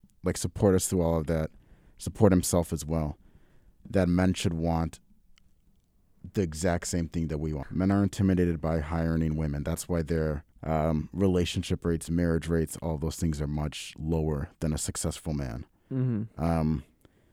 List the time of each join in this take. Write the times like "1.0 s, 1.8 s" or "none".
7.6 s, 10.5 s